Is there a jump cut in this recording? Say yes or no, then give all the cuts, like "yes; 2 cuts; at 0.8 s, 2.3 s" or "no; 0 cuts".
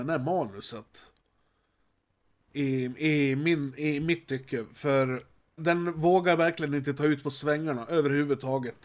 yes; 1 cut; at 5.6 s